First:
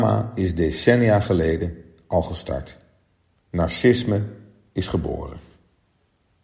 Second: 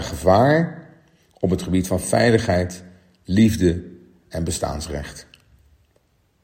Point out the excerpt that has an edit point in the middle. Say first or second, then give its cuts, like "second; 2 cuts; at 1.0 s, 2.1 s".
first; 1 cut; at 3.4 s